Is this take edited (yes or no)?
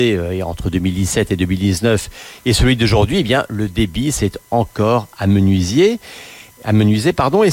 no